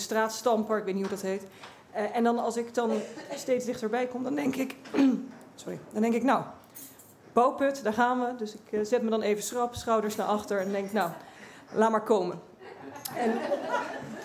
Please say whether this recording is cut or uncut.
cut